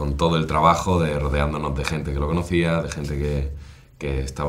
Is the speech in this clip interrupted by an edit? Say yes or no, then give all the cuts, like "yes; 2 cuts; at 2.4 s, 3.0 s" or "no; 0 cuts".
no; 0 cuts